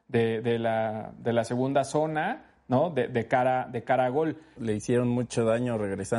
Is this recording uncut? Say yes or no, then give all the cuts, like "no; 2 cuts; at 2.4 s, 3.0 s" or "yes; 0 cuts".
no; 1 cut; at 4.6 s